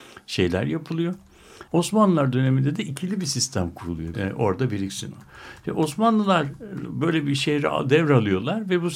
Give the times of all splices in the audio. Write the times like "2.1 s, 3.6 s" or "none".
1.7 s, 4.1 s